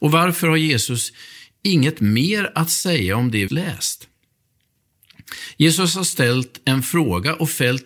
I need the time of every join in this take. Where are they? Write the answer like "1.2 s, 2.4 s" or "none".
3.5 s